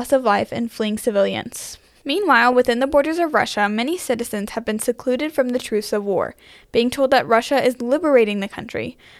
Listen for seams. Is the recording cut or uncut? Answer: uncut